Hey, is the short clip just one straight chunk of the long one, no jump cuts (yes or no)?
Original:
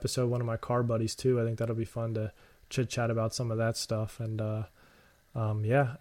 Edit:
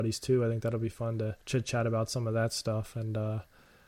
no